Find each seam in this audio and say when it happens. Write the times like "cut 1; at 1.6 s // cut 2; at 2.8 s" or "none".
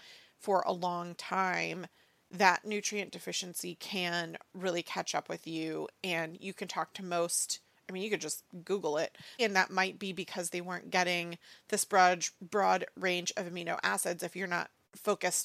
cut 1; at 9.4 s